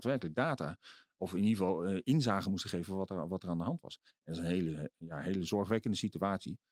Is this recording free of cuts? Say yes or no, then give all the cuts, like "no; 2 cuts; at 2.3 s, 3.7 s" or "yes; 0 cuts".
yes; 0 cuts